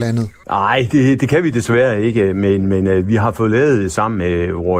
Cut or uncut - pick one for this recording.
uncut